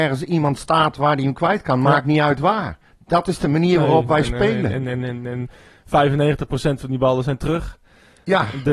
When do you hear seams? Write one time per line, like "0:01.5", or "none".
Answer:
none